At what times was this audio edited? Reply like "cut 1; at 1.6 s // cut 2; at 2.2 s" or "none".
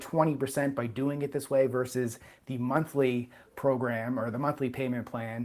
none